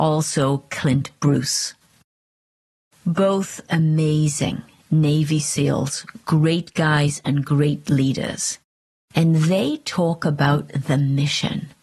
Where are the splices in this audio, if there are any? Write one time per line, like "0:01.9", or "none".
none